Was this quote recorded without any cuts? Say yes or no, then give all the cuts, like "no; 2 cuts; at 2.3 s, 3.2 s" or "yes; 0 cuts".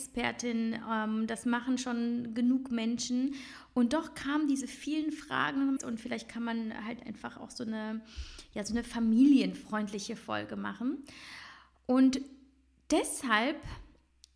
no; 1 cut; at 5.8 s